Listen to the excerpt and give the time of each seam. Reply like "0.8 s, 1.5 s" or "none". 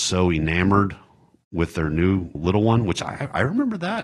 2.3 s